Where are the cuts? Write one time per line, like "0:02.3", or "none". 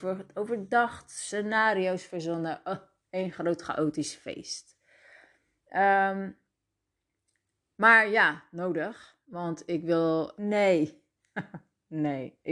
0:10.4